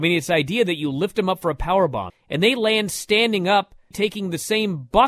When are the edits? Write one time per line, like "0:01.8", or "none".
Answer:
0:02.1
0:03.9

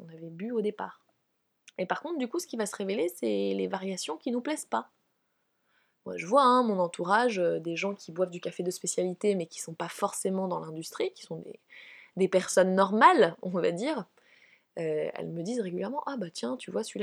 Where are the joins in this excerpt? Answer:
none

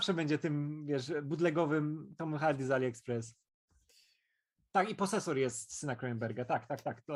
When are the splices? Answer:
none

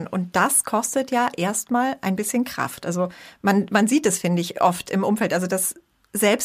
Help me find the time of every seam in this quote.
none

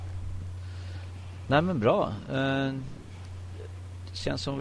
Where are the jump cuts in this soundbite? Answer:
none

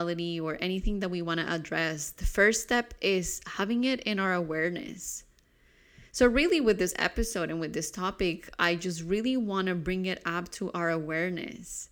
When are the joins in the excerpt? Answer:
none

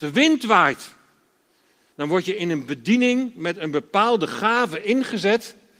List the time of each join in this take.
0:01.9

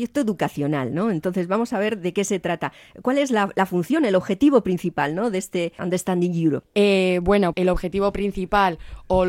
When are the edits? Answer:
0:07.5

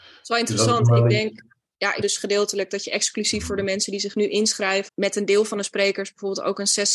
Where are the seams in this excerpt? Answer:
0:02.0
0:04.9

